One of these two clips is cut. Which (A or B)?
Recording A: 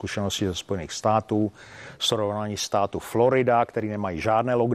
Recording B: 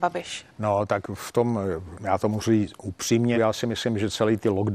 B